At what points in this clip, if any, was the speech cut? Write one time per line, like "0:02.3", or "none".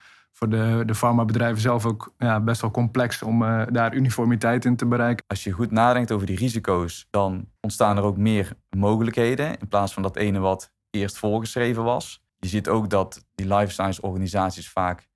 0:05.2